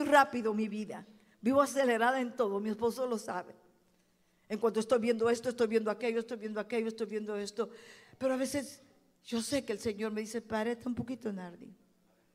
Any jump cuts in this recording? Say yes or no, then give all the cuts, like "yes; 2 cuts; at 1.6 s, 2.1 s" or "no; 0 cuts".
no; 0 cuts